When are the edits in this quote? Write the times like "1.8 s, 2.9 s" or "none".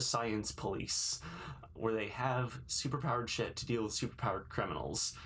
1.8 s